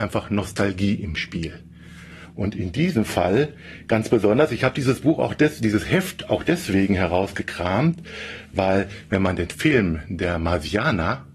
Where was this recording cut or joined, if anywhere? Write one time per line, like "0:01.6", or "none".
none